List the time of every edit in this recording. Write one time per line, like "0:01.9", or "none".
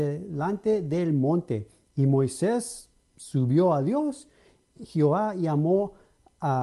0:04.8